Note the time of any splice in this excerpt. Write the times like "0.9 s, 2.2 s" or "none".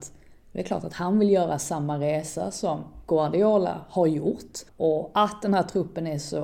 4.7 s